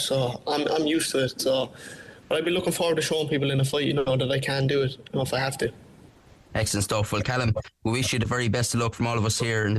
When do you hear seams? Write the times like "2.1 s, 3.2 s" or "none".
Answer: none